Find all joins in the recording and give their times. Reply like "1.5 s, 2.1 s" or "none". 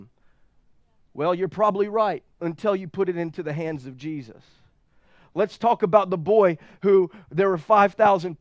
none